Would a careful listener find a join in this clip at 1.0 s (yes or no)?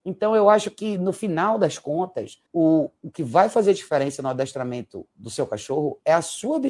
no